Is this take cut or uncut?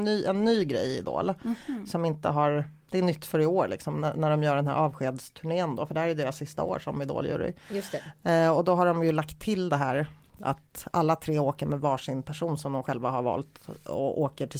uncut